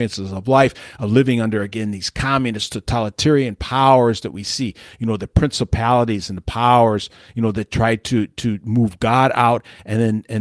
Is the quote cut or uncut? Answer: uncut